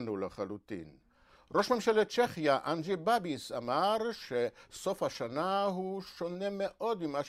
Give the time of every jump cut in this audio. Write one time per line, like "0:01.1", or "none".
none